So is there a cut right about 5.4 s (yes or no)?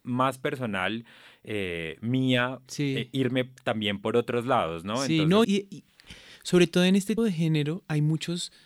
yes